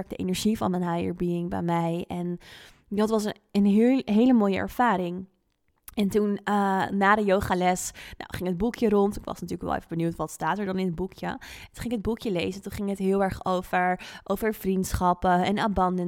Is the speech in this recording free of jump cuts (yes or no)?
yes